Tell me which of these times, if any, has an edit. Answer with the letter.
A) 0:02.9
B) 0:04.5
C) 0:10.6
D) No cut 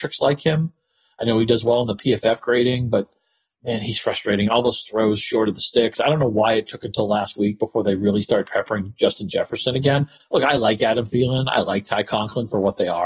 D